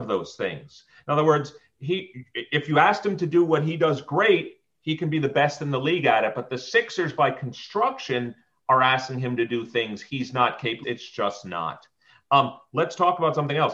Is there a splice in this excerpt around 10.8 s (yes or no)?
yes